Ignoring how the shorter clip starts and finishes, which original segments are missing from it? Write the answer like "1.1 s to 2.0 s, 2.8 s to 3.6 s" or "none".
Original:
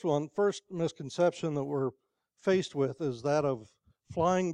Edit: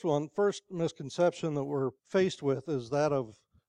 2.0 s to 2.3 s